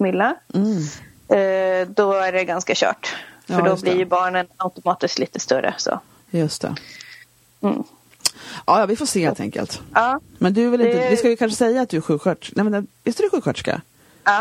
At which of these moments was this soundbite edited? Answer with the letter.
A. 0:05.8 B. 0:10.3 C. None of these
C